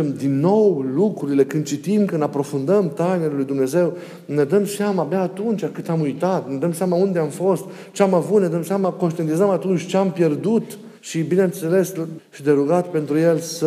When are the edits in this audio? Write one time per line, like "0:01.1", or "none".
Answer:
0:11.0
0:12.2